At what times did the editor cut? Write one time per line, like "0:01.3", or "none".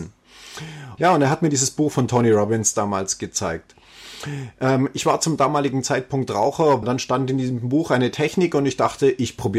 0:01.0
0:06.8